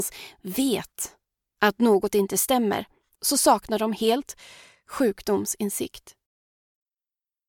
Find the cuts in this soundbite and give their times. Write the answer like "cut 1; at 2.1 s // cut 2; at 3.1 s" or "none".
cut 1; at 3.1 s